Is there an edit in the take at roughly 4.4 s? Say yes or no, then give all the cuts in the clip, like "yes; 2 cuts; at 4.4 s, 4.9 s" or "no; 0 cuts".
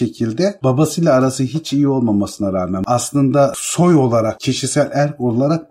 yes; 1 cut; at 4.4 s